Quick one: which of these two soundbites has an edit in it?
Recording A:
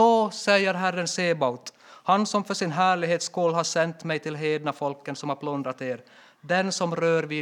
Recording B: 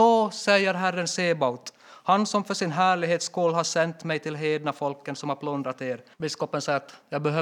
B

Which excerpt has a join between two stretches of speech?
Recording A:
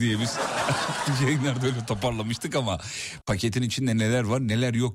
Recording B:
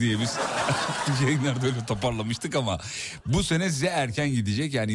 A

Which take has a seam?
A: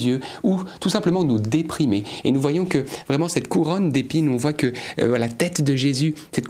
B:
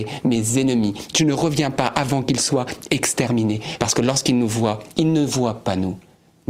B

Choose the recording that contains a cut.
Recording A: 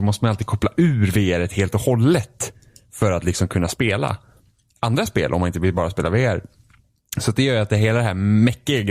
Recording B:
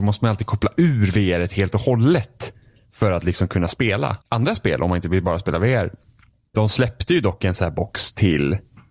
B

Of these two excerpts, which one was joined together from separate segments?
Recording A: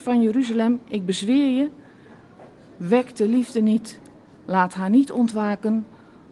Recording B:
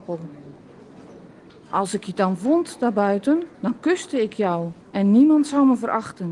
B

